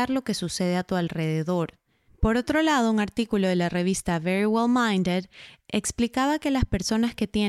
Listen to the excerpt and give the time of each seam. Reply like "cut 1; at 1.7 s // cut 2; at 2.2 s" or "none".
cut 1; at 2.1 s